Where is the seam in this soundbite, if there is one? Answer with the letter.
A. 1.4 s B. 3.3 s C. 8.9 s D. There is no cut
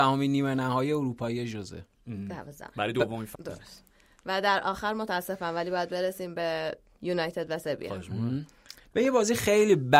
B